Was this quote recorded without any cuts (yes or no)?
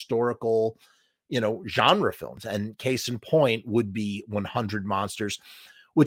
yes